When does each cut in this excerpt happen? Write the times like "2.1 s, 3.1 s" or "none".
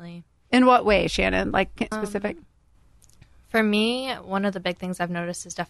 1.9 s